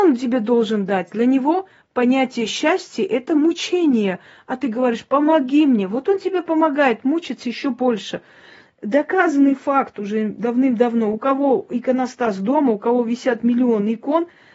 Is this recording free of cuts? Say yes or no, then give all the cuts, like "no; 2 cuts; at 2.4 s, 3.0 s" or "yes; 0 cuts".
yes; 0 cuts